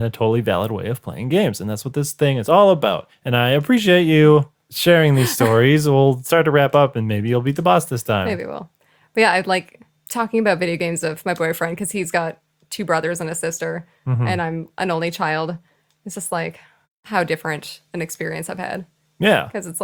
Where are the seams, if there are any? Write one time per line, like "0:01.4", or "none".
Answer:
none